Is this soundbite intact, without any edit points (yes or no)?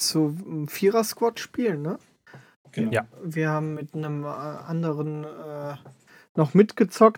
yes